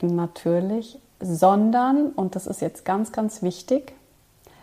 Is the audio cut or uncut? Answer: uncut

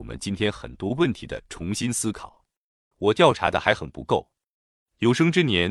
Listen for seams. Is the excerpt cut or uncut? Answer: cut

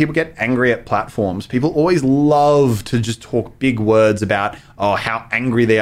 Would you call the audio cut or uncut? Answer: uncut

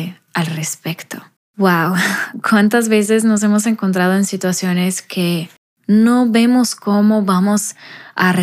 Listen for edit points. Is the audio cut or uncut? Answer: uncut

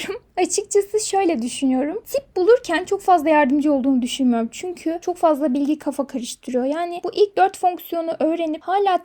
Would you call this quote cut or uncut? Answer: uncut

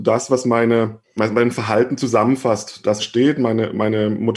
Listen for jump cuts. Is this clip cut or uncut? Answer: cut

